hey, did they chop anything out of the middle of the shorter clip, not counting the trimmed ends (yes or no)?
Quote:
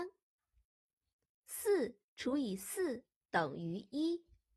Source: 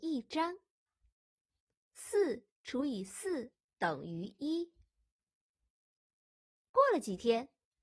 no